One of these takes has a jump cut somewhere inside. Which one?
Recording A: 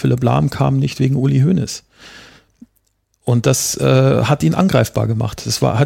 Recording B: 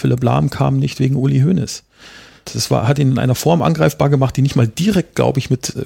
B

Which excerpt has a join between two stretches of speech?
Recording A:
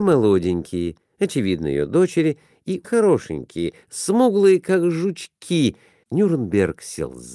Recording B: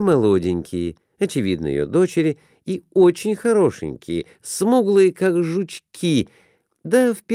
A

